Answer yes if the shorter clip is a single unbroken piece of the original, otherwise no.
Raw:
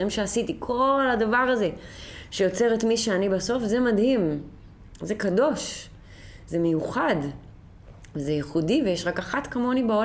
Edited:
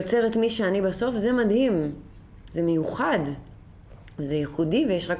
no